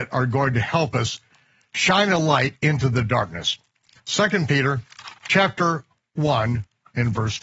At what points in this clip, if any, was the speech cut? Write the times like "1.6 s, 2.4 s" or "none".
none